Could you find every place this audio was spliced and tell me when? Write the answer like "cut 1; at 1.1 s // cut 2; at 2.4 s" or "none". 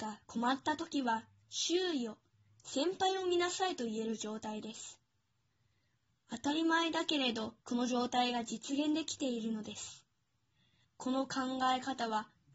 cut 1; at 7.6 s // cut 2; at 10.8 s